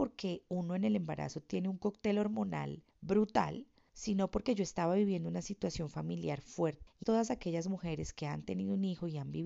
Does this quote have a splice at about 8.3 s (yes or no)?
no